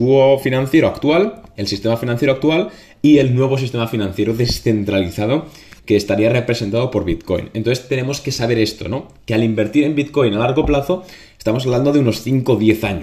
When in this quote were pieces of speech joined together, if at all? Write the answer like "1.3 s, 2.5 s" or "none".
none